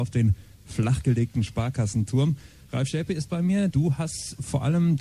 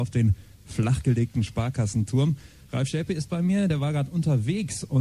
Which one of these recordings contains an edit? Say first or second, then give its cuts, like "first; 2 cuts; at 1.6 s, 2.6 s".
first; 1 cut; at 3.7 s